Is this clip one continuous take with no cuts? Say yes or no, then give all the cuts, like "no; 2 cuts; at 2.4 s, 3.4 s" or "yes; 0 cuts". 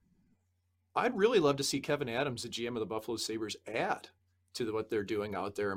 yes; 0 cuts